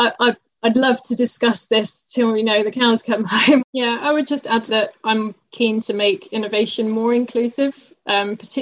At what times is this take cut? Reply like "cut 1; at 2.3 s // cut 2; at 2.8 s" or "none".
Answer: cut 1; at 3.6 s // cut 2; at 4.7 s